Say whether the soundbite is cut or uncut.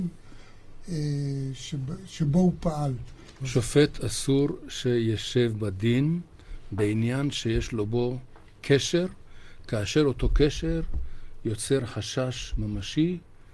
cut